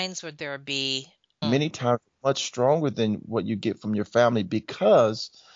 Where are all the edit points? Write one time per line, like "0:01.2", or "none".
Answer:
0:01.4